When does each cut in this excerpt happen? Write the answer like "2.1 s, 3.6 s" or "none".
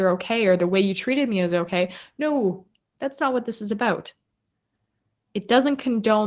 none

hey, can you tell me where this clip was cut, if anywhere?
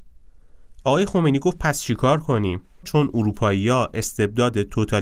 2.8 s

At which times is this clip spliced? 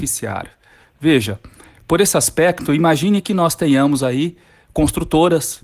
none

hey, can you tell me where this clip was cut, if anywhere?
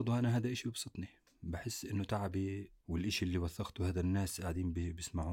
none

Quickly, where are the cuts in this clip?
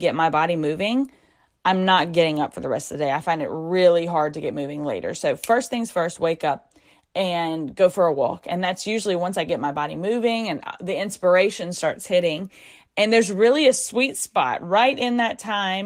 none

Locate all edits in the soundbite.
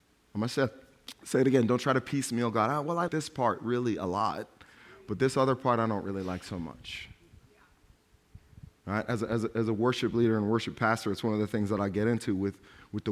3.1 s

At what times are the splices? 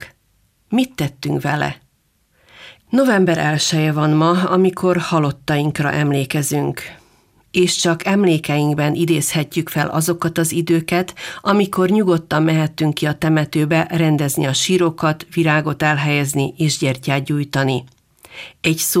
2.8 s

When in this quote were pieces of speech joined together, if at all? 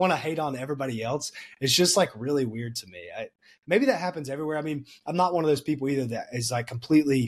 none

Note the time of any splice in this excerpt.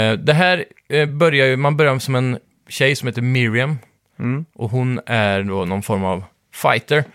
none

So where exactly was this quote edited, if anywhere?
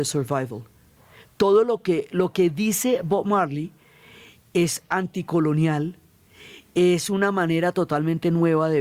none

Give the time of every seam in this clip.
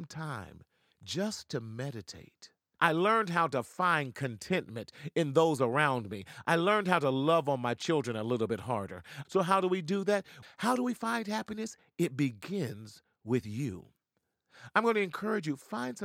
2.8 s, 9.2 s, 10.4 s

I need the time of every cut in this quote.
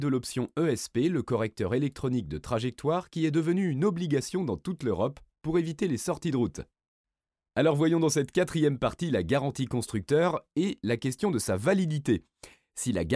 none

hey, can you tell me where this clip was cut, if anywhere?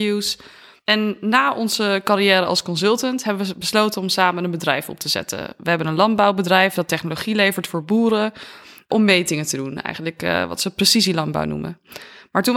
none

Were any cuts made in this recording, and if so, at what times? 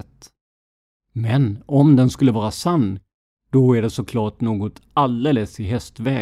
1.0 s

